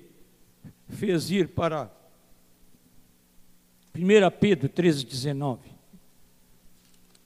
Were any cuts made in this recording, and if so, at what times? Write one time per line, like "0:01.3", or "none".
none

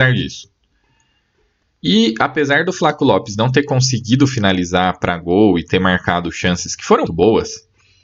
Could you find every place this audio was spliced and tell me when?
0:07.1

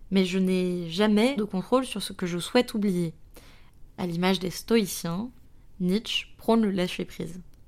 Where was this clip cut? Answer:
0:01.4
0:03.9

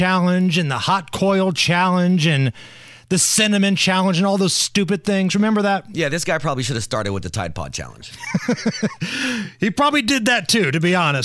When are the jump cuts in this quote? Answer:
none

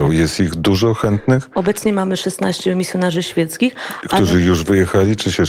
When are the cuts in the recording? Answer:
none

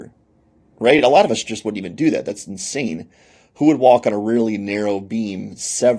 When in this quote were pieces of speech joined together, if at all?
none

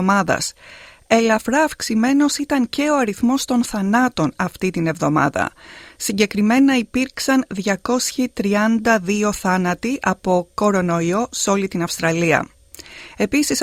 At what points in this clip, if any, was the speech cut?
none

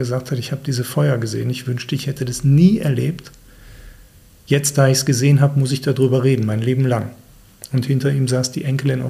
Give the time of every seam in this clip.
none

